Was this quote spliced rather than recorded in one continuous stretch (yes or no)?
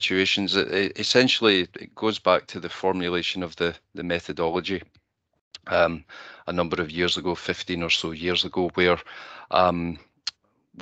no